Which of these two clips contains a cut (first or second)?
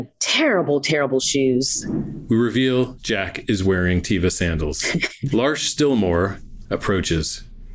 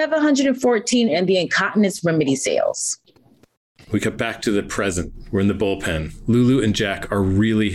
first